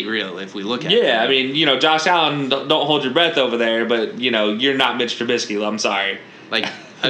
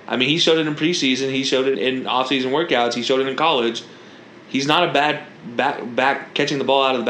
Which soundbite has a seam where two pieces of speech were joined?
second; 1 cut; at 1.7 s

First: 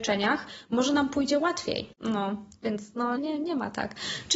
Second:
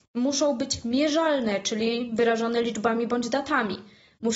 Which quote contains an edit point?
first; 2 cuts; at 1.9 s, 3.2 s

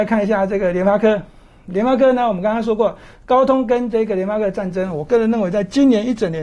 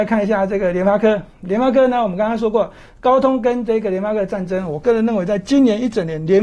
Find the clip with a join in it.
second; 1 cut; at 1.3 s

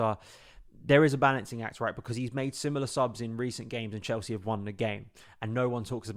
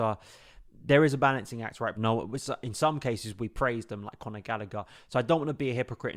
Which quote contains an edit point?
second; 1 cut; at 1.9 s

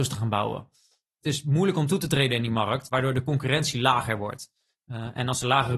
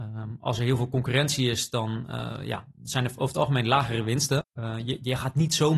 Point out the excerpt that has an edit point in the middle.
second; 1 cut; at 4.4 s

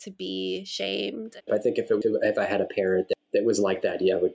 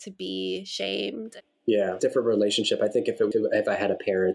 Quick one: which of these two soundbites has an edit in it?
first; 1 cut; at 1.5 s

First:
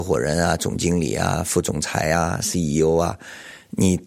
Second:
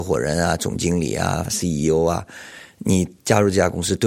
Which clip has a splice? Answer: second; 1 cut; at 1.5 s

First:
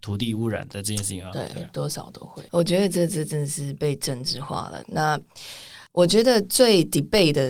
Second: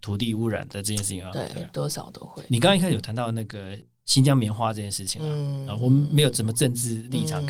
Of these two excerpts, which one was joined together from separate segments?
first; 3 cuts; at 2.5 s, 4.8 s, 5.9 s

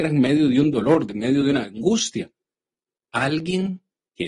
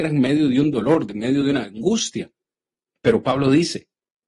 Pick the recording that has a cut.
second; 1 cut; at 3.0 s

